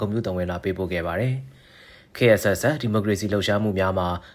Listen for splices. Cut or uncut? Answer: uncut